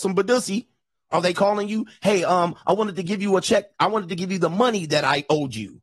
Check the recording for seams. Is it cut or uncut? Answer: uncut